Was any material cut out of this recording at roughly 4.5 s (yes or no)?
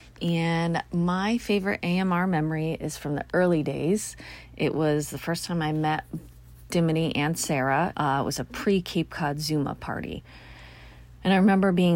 no